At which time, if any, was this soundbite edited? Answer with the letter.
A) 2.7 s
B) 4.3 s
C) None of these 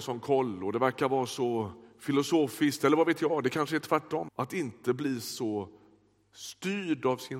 B